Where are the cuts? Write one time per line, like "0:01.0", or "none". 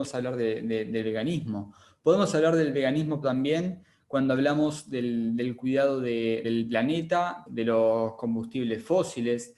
0:03.2
0:06.4
0:07.5